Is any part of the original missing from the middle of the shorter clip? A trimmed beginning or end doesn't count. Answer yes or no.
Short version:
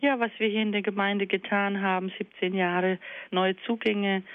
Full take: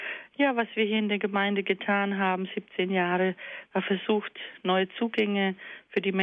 yes